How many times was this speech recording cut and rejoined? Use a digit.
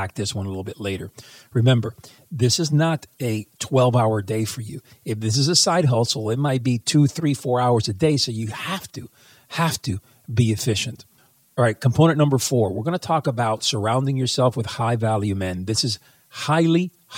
0